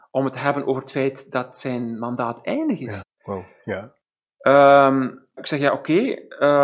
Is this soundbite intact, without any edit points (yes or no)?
no